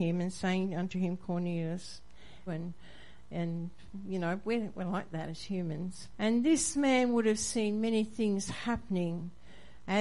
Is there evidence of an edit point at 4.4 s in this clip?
no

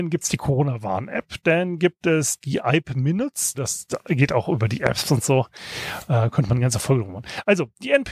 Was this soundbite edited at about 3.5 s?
yes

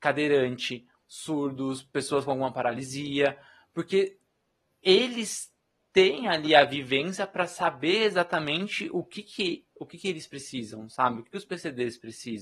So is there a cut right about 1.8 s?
no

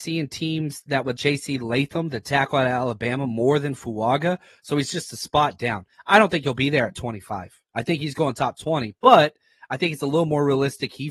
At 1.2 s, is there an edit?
yes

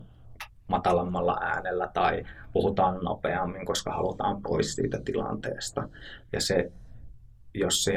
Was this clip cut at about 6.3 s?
yes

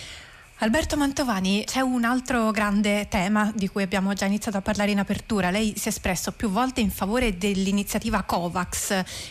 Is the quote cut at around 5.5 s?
no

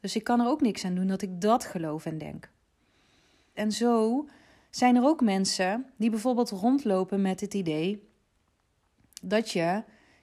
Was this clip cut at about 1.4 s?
no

